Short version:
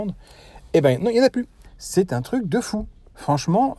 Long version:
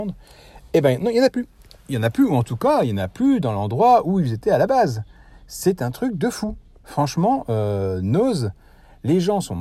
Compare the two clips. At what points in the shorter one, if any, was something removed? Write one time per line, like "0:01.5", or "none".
0:01.6